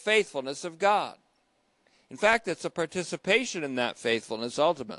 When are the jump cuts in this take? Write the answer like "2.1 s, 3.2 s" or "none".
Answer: none